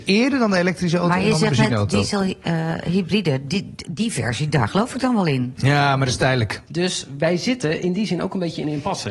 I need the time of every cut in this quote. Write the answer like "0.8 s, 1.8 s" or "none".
6.7 s